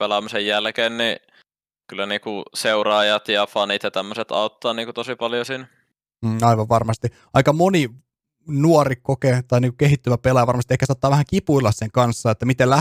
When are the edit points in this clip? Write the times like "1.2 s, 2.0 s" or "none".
none